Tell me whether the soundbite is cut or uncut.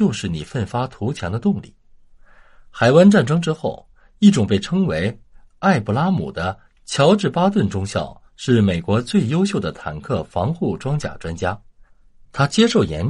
cut